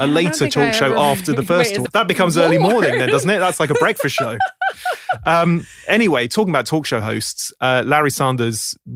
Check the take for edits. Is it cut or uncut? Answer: cut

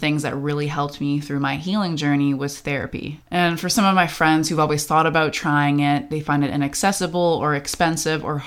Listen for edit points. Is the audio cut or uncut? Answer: uncut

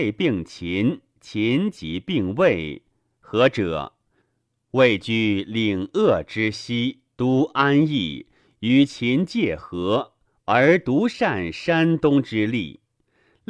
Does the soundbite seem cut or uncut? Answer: cut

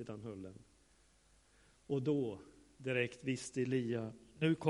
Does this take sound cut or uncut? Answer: uncut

